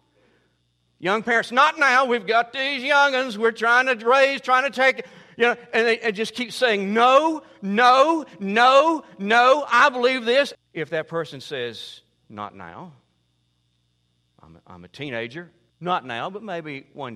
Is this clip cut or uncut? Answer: cut